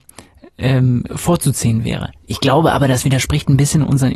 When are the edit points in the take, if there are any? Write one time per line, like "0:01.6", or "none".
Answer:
0:01.1
0:02.2